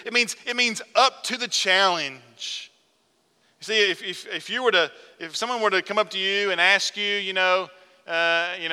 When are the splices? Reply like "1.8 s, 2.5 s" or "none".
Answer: 3.4 s